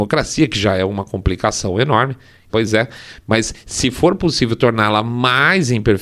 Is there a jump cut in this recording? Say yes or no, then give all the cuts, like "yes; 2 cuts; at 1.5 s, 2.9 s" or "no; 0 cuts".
yes; 1 cut; at 2.5 s